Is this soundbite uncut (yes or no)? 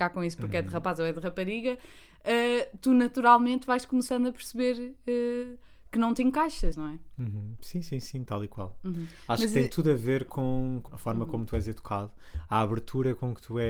no